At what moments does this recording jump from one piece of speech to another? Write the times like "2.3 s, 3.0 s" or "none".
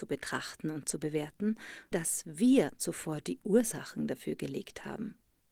1.9 s